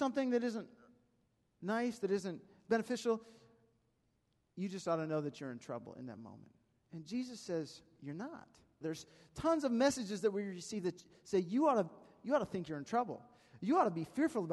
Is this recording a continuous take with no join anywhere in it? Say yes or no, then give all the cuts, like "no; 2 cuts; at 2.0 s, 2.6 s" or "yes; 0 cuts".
no; 1 cut; at 8.8 s